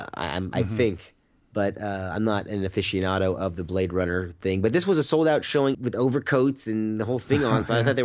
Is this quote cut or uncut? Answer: cut